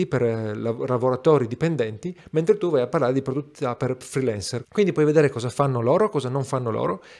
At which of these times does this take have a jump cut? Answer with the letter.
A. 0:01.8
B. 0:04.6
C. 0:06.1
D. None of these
B